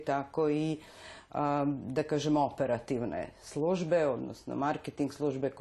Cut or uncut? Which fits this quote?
uncut